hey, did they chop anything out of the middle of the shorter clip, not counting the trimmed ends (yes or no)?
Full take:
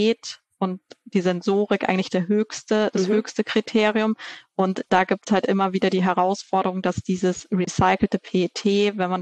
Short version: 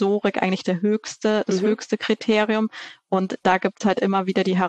no